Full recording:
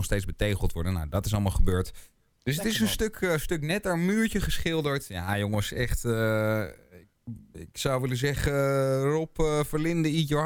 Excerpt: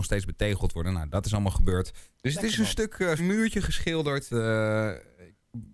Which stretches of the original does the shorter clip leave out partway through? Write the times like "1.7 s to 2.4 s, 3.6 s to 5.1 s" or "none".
2.1 s to 2.4 s, 3.4 s to 4.0 s, 5.1 s to 6.0 s